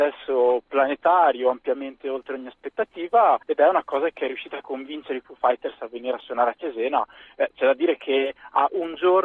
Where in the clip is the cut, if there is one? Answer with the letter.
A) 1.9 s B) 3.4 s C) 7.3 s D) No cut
B